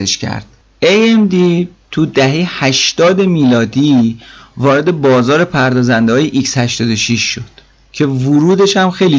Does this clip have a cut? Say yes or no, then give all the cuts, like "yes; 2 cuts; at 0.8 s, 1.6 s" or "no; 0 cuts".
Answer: no; 0 cuts